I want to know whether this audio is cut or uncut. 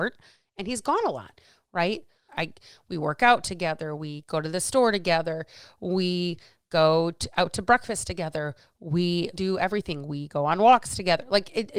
cut